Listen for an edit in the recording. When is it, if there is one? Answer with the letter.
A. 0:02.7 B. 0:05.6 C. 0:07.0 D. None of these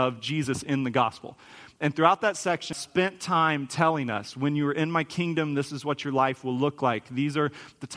A